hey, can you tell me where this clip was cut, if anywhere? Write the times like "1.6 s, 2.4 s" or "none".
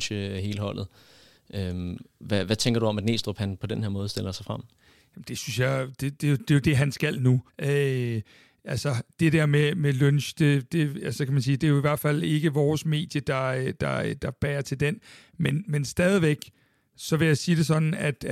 7.5 s